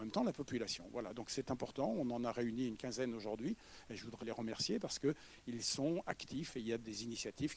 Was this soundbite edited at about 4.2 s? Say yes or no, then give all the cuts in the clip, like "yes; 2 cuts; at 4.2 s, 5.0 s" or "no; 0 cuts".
yes; 1 cut; at 4.2 s